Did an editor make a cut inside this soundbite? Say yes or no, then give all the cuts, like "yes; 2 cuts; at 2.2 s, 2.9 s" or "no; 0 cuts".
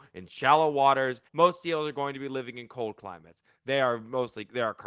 yes; 1 cut; at 1.3 s